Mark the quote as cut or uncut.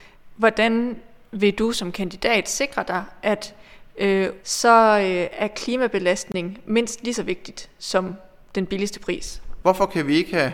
cut